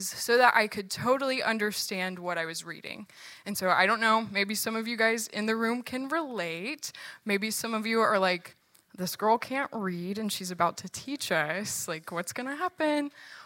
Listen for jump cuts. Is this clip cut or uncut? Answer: uncut